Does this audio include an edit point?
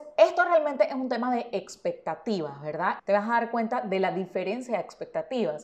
yes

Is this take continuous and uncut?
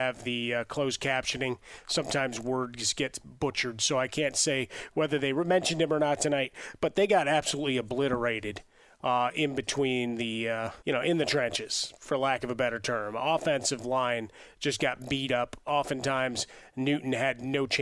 no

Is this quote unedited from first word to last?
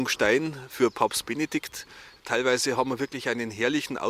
no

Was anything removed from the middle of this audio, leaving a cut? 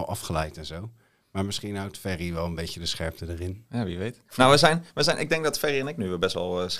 no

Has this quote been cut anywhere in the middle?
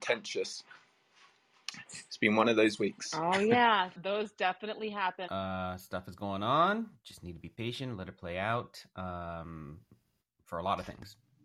yes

